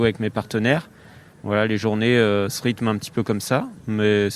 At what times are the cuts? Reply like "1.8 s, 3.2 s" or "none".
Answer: none